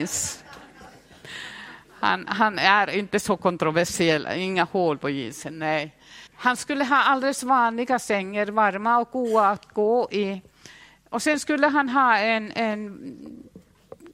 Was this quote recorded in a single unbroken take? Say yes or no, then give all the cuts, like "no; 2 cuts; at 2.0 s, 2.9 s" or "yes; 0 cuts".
no; 1 cut; at 6.3 s